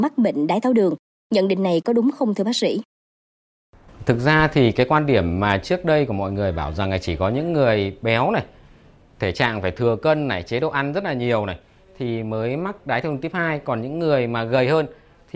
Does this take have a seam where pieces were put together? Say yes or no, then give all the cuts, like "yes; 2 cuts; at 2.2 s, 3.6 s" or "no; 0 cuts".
no; 0 cuts